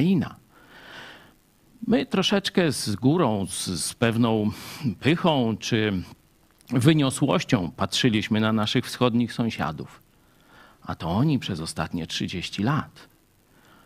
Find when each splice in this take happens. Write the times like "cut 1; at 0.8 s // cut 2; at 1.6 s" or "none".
none